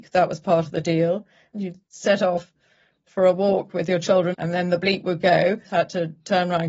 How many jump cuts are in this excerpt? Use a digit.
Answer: 3